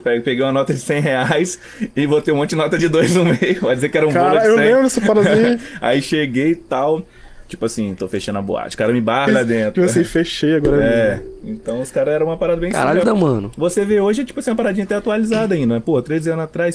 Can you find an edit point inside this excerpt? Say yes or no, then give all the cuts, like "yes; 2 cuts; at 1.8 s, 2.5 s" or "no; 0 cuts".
yes; 2 cuts; at 9.3 s, 13.0 s